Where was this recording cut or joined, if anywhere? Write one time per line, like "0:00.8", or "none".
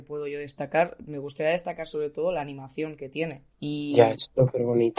0:03.5